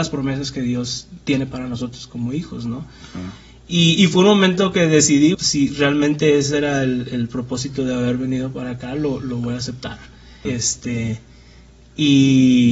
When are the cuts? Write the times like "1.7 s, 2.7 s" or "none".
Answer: 5.3 s, 10.5 s